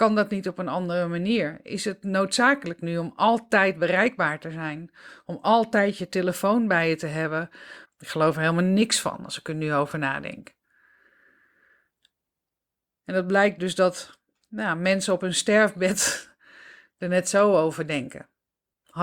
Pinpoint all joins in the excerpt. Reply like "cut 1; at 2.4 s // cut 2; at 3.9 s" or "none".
cut 1; at 7.8 s